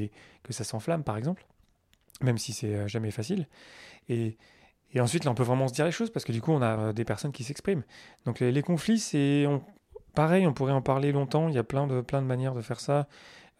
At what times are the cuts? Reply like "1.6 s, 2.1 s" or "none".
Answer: 6.8 s